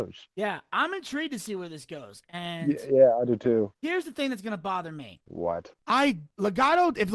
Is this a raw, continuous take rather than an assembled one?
yes; 0 cuts

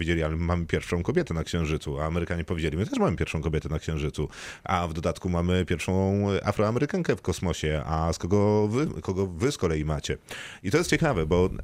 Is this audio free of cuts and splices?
yes; 0 cuts

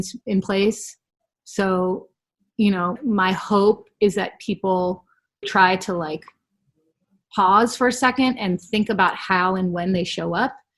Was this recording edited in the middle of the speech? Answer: yes; 2 cuts; at 3.0 s, 5.4 s

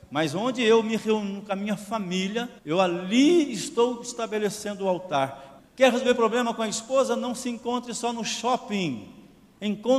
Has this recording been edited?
yes; 2 cuts; at 2.6 s, 5.6 s

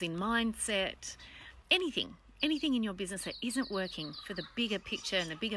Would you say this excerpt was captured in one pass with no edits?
no; 1 cut; at 1.6 s

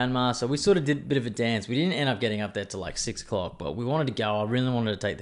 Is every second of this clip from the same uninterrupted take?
yes; 0 cuts

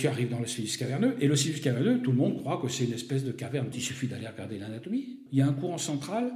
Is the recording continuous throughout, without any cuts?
no; 2 cuts; at 3.7 s, 5.3 s

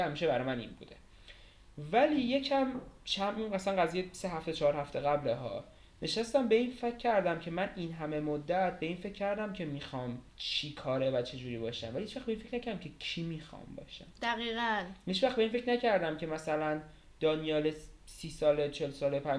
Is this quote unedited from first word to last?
no; 1 cut; at 10.3 s

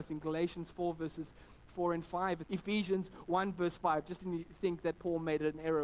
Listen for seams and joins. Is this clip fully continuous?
no; 2 cuts; at 2.4 s, 4.9 s

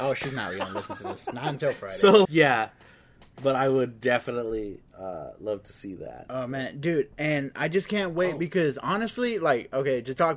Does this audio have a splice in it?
yes; 1 cut; at 2.2 s

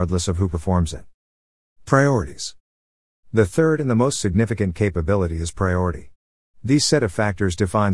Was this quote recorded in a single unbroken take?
yes; 0 cuts

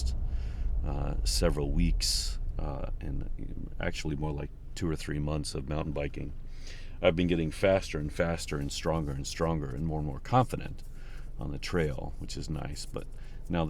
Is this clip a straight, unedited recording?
yes; 0 cuts

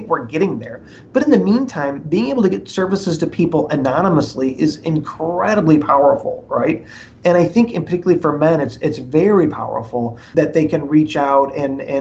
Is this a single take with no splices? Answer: no; 1 cut; at 10.3 s

